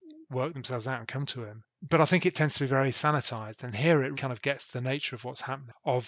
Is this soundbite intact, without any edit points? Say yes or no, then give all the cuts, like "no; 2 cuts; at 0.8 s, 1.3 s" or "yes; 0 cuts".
no; 1 cut; at 4.1 s